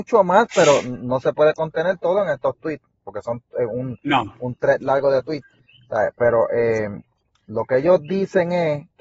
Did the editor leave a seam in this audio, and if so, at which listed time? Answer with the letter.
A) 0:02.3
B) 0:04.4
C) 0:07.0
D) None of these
D